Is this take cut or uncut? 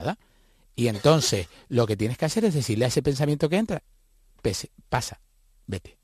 uncut